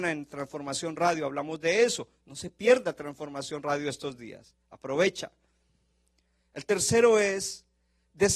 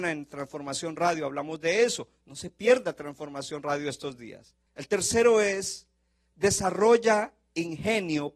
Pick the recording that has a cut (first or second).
second